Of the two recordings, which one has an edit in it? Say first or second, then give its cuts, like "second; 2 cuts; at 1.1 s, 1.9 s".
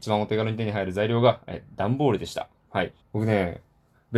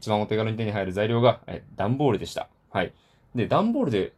first; 1 cut; at 3.0 s